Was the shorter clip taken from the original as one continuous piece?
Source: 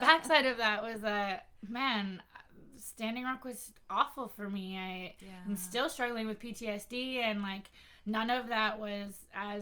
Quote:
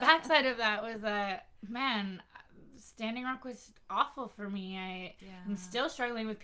yes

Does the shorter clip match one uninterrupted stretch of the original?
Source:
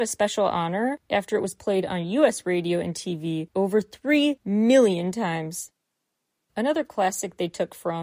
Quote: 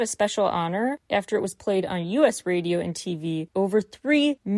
yes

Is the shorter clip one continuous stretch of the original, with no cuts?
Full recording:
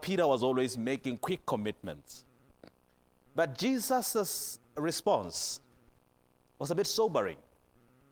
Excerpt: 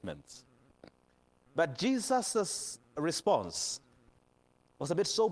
yes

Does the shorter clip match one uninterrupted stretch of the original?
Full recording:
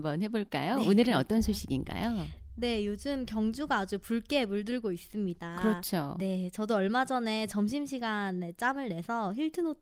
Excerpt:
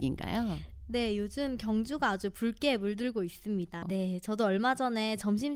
no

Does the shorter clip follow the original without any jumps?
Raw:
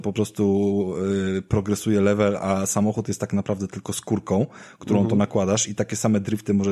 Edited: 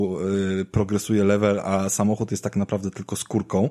yes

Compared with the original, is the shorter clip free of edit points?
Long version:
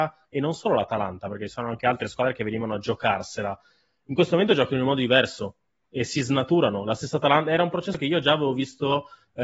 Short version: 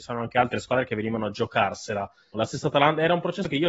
no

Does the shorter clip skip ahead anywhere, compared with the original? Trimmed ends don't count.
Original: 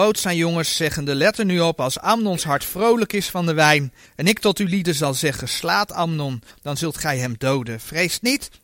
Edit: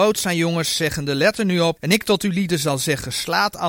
yes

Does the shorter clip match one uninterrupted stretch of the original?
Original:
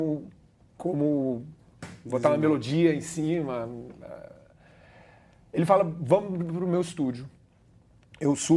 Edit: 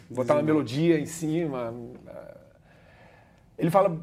yes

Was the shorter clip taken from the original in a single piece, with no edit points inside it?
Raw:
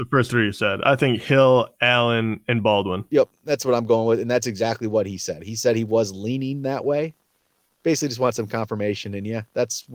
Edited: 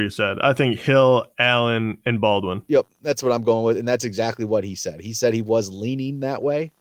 yes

